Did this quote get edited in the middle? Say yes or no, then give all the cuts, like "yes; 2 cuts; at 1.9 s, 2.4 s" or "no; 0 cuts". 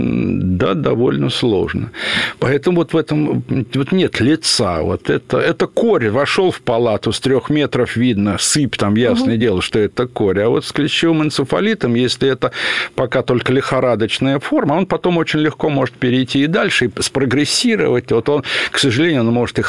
no; 0 cuts